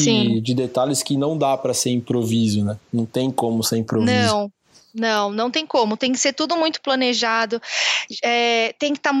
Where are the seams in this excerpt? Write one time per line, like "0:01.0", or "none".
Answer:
none